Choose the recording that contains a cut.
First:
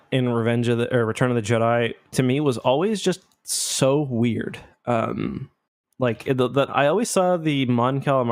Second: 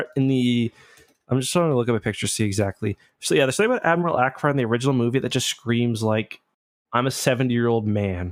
first; 1 cut; at 6.7 s

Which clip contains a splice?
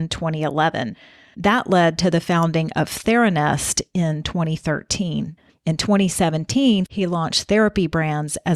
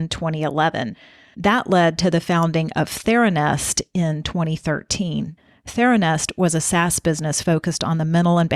first; 2 cuts; at 5.5 s, 6.9 s

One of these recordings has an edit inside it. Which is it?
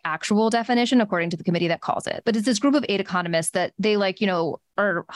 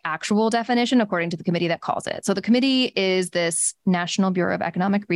first; 1 cut; at 2.2 s

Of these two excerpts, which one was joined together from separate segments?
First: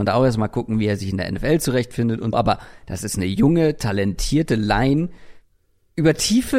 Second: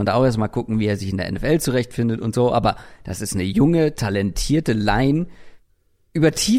first; 1 cut; at 2.3 s

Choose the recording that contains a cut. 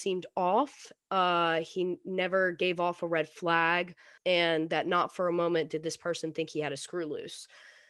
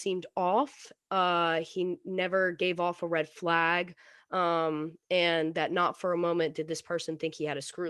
first; 1 cut; at 4.2 s

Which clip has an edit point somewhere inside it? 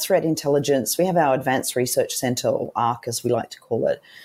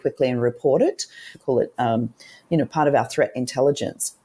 second; 1 cut; at 1.3 s

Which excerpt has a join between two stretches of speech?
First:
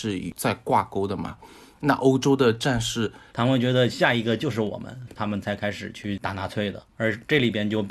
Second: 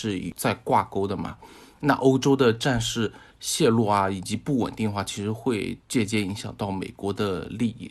first; 2 cuts; at 3.3 s, 5.2 s

